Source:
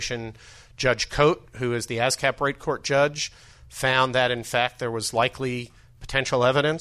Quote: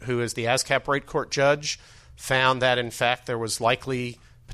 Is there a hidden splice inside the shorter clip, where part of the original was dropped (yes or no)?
no